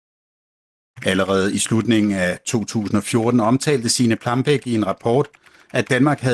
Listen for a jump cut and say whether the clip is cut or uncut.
cut